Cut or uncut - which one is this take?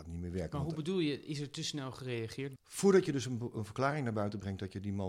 cut